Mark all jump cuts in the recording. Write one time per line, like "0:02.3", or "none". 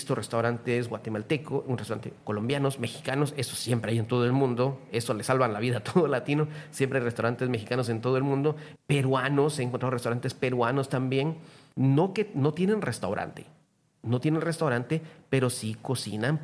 0:02.2
0:08.8
0:11.7